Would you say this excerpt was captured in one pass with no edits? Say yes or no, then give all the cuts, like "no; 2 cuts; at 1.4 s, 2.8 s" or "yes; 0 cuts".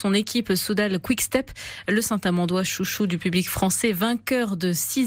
yes; 0 cuts